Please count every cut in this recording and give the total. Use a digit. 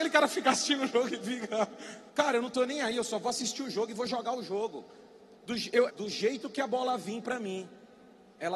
2